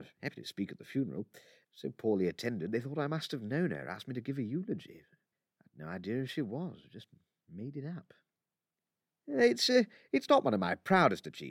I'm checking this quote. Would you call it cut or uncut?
cut